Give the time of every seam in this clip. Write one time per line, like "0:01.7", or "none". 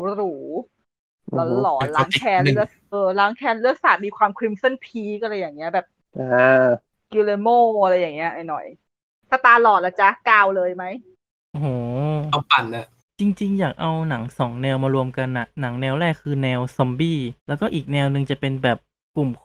0:02.9
0:17.4